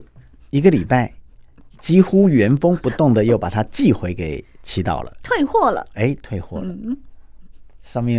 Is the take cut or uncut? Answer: uncut